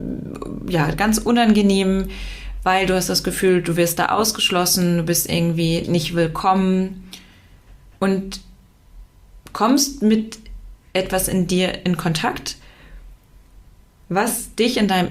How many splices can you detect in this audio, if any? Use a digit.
1